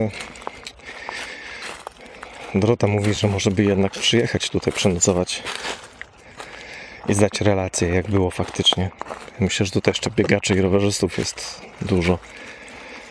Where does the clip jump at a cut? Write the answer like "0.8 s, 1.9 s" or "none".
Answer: none